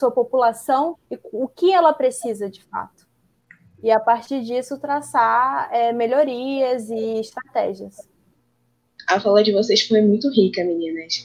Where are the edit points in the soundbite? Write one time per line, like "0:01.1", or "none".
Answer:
0:00.9